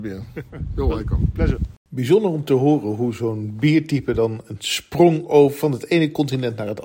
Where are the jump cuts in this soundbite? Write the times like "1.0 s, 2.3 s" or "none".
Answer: 1.8 s